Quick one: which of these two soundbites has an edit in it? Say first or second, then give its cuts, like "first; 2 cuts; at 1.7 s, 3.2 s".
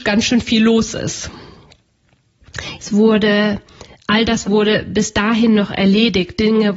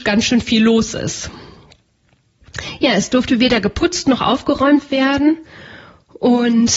first; 2 cuts; at 2.8 s, 4.4 s